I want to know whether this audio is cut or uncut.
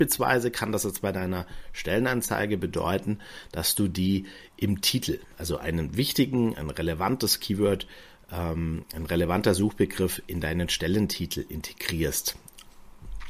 uncut